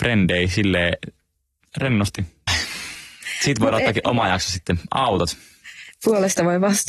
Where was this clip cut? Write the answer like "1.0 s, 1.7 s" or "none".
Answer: 2.5 s